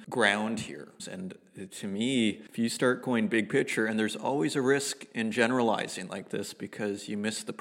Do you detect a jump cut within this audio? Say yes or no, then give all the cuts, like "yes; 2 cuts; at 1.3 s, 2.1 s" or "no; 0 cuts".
yes; 1 cut; at 1.0 s